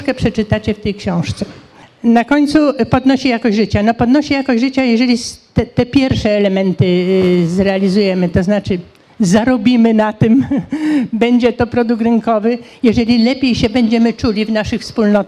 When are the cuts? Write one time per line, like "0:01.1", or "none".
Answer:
none